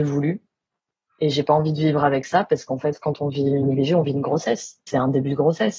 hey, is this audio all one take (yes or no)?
yes